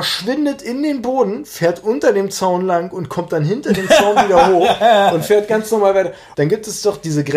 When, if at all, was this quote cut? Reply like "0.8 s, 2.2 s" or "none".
6.3 s